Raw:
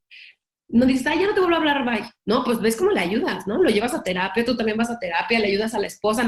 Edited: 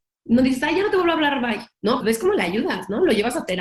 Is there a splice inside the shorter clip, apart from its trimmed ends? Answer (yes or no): yes